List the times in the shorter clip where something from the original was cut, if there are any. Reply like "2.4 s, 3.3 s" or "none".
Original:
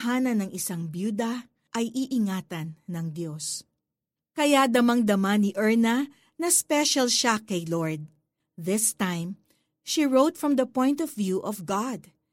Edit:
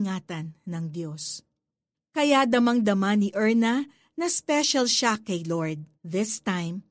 5.9 s